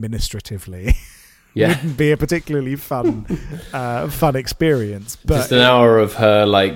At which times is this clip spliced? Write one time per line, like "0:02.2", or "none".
none